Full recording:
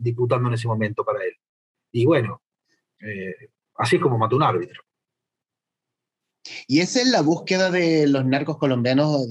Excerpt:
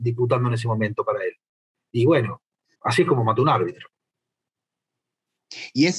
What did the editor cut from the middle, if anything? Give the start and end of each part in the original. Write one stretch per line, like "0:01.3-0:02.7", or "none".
0:02.8-0:03.7